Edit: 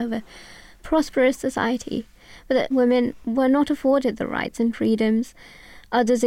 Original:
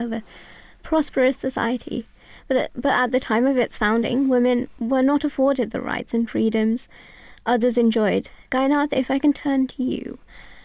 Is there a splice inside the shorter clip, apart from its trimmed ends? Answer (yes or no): yes